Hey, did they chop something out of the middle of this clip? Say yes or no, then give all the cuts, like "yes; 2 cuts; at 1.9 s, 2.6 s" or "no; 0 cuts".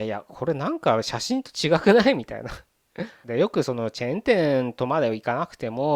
yes; 1 cut; at 3.2 s